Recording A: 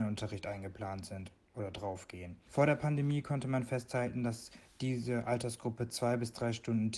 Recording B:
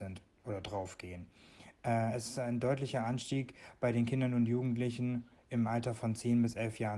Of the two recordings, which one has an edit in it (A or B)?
A